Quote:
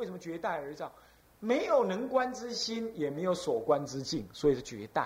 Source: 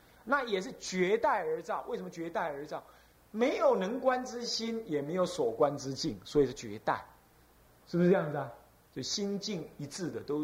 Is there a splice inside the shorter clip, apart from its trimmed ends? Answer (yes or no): no